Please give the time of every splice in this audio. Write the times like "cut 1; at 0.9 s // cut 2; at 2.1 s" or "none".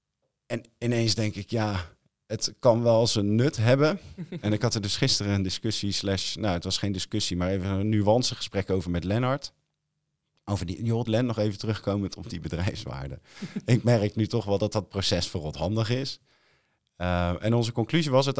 cut 1; at 11.1 s